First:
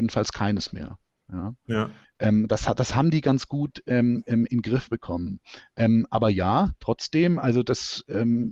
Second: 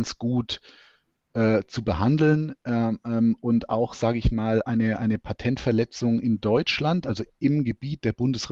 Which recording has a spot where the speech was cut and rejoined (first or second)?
first